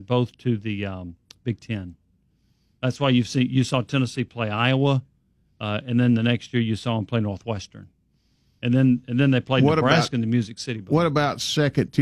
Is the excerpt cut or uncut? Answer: uncut